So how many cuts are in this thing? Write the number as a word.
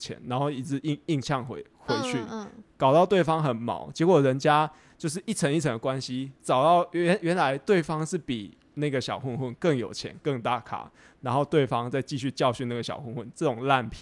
zero